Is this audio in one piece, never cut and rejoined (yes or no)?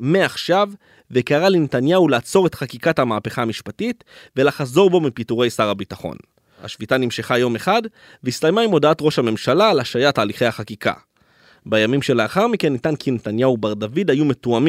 yes